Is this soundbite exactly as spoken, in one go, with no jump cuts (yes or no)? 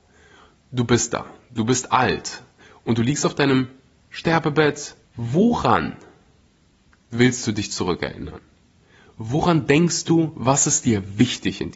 no